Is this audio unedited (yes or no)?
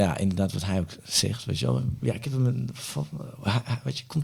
yes